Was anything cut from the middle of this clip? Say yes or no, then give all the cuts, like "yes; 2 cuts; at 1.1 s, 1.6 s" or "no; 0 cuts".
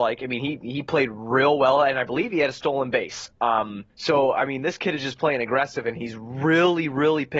yes; 1 cut; at 3.9 s